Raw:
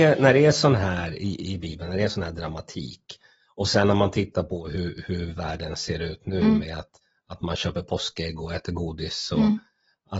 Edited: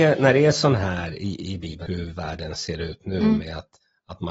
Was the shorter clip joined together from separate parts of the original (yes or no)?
yes